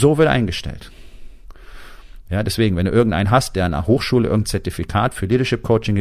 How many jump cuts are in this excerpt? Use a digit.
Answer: 1